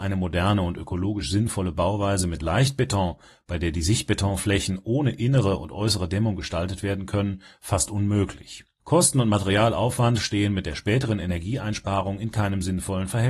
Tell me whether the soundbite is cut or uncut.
uncut